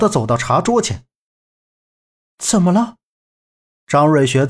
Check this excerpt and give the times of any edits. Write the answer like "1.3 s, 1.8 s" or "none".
none